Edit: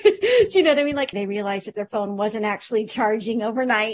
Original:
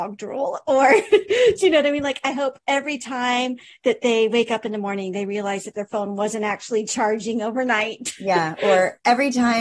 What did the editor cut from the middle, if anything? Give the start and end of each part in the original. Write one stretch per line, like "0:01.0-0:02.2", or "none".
0:02.2-0:05.1